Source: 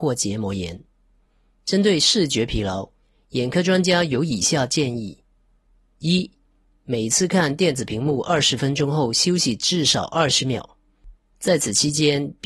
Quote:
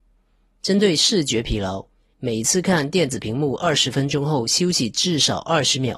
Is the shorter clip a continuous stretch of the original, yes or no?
no